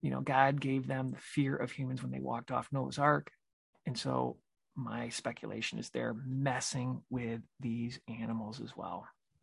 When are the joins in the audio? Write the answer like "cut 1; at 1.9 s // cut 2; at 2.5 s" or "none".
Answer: none